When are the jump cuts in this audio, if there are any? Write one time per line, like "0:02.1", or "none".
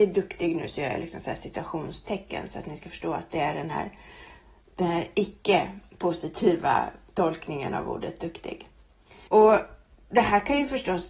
0:09.3